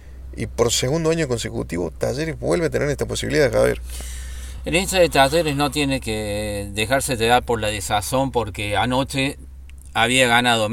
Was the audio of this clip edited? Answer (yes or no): no